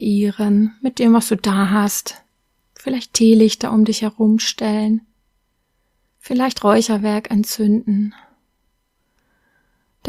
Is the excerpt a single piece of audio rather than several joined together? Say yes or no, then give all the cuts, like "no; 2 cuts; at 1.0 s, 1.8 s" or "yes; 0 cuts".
yes; 0 cuts